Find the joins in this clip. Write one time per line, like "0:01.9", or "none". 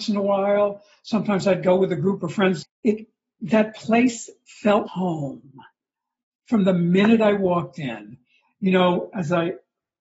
0:02.6
0:04.9